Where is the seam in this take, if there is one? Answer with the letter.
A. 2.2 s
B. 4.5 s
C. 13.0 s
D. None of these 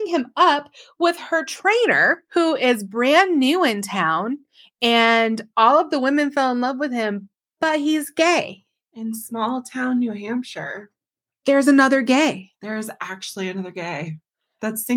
A